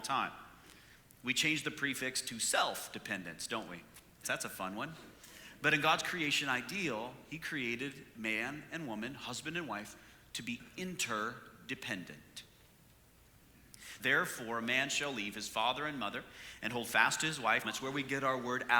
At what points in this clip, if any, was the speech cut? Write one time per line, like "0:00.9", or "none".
0:04.2
0:14.0
0:17.6